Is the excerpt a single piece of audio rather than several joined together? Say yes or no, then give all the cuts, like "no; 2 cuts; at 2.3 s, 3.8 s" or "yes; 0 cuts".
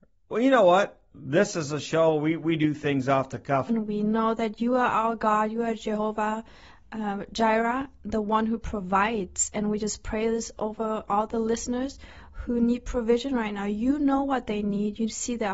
no; 1 cut; at 3.7 s